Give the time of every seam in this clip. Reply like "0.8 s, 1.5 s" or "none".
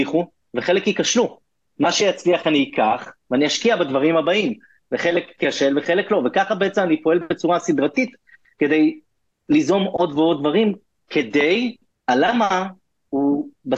10.1 s, 11.9 s

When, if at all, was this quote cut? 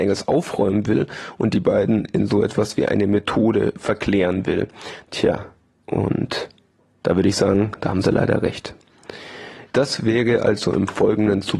5.1 s, 9.7 s

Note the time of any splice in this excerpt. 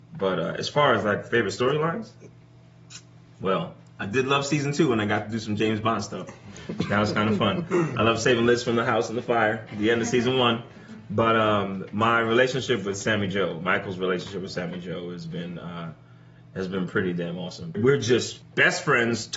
none

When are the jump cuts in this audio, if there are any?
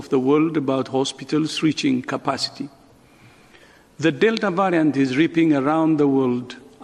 none

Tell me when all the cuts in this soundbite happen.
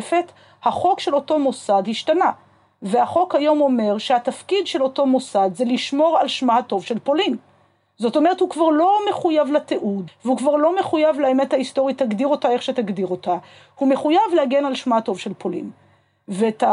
10.1 s

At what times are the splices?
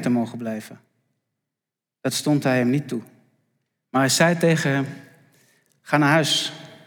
none

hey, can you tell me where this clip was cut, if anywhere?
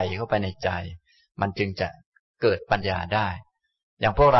2.8 s

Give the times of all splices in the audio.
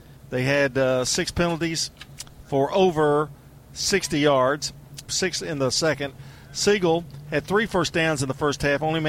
5.1 s

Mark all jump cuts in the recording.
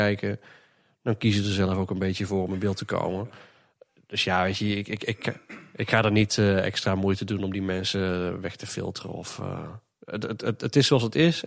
none

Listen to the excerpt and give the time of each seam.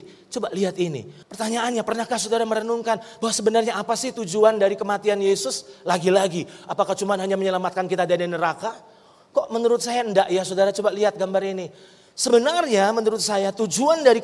1.2 s

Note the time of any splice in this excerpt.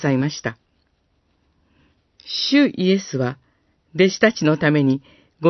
2.2 s

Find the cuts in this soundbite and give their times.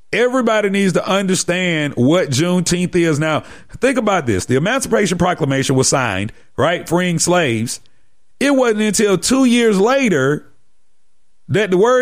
none

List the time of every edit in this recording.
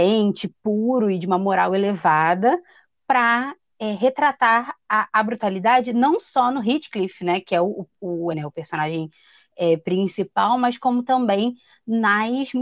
8.3 s

